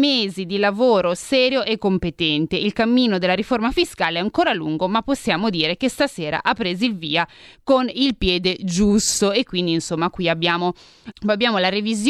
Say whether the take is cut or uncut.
cut